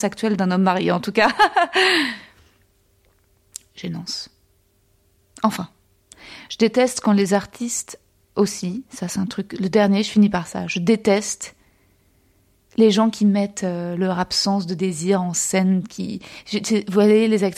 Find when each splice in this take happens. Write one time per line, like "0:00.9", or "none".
none